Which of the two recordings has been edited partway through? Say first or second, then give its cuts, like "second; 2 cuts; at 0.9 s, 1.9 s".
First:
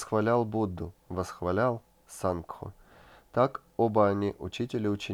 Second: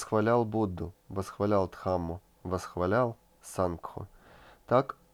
first; 1 cut; at 1.0 s